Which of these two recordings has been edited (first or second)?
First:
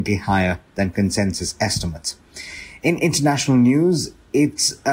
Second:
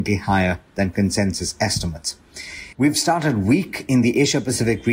second